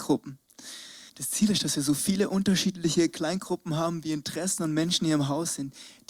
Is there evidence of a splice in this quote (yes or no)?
yes